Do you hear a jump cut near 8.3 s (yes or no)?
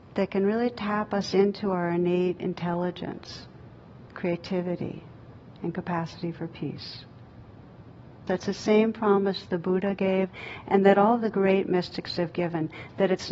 yes